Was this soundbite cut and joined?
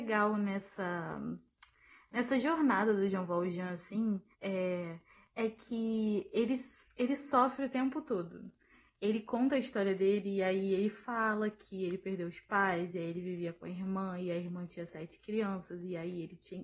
yes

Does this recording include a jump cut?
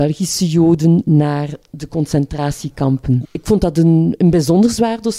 yes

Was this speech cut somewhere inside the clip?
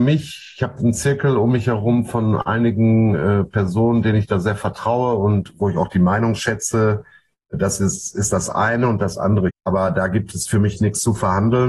yes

